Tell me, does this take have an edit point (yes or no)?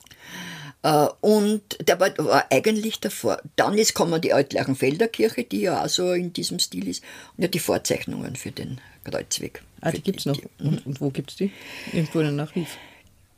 yes